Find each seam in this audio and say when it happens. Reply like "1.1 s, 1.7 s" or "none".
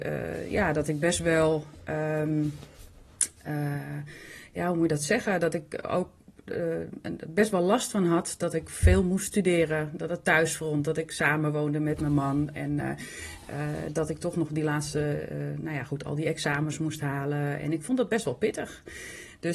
none